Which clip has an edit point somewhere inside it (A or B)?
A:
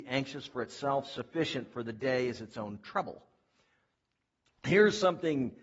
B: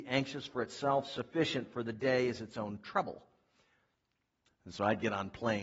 B